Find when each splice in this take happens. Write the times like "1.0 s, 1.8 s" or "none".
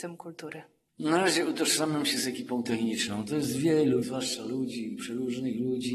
4.0 s